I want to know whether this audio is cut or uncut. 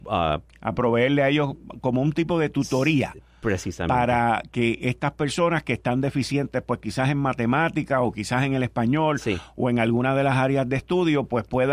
uncut